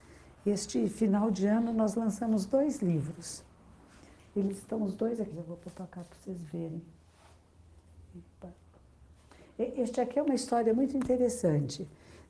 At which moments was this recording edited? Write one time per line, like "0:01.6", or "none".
0:05.3